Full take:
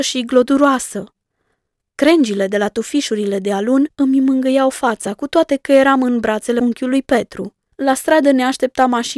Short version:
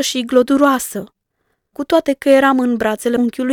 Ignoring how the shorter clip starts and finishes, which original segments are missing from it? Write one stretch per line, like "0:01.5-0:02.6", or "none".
0:01.7-0:05.2